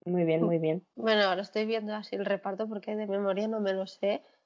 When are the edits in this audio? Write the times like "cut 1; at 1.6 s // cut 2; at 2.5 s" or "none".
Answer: none